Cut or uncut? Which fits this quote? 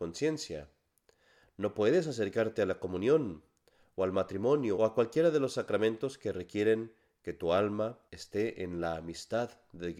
cut